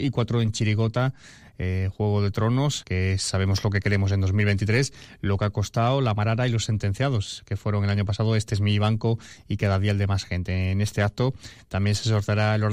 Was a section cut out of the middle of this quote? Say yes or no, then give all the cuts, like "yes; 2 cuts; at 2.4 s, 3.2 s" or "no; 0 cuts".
yes; 1 cut; at 2.8 s